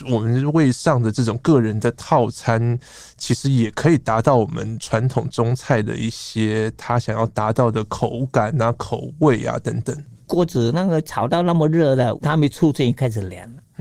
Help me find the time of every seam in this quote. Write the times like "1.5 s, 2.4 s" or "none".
10.2 s, 12.2 s